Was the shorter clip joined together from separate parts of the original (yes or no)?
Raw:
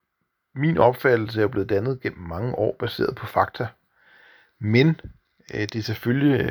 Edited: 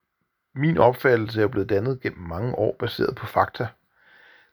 no